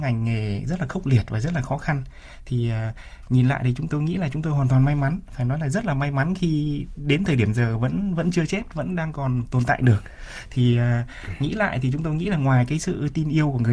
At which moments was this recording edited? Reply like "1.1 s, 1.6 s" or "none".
3.9 s